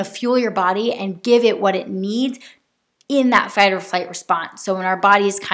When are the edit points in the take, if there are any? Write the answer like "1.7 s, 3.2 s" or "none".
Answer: none